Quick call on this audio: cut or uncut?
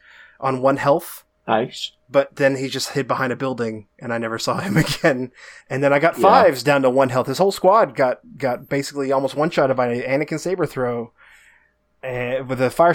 uncut